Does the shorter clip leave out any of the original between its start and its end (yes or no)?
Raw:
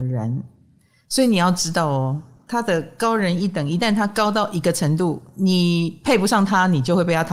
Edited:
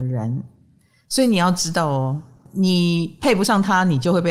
yes